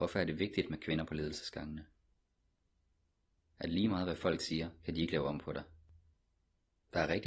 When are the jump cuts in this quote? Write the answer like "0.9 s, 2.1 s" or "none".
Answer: 3.4 s